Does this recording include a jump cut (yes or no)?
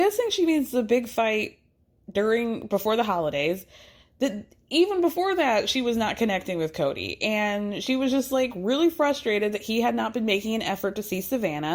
no